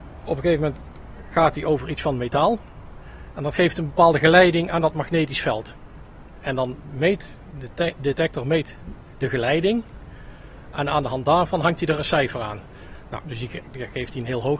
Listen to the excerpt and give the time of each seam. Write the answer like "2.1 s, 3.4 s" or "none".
13.2 s

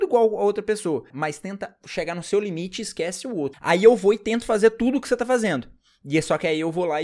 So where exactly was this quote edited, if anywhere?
1.1 s, 3.5 s

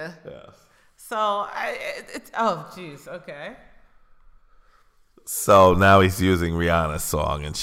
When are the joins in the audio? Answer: none

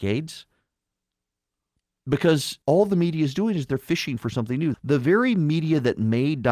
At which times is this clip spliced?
2.6 s, 4.7 s

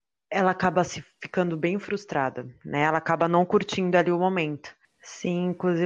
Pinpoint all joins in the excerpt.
4.8 s

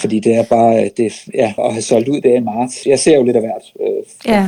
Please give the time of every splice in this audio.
1.6 s, 2.8 s

